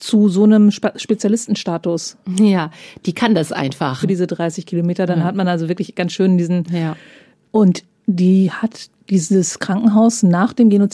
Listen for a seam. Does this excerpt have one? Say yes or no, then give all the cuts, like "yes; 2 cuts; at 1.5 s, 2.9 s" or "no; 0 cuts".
yes; 2 cuts; at 4.0 s, 7.4 s